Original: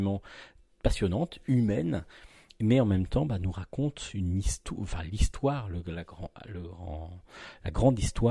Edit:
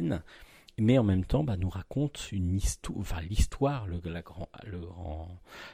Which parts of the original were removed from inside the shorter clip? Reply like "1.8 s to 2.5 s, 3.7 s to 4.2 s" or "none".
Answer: none